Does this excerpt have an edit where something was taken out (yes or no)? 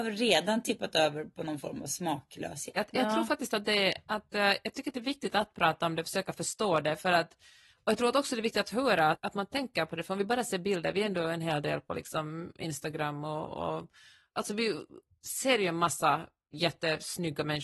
yes